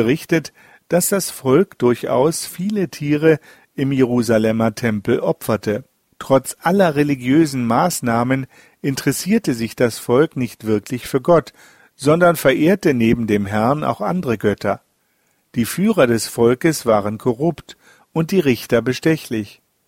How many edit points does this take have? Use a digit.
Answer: 1